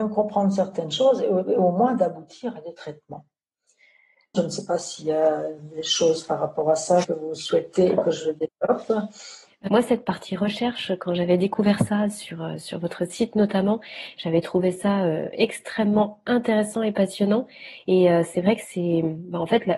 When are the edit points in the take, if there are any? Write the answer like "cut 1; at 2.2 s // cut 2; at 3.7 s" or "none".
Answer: cut 1; at 4.3 s // cut 2; at 7.0 s // cut 3; at 9.6 s